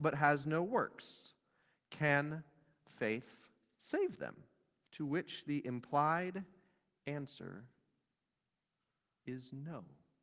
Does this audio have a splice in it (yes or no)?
yes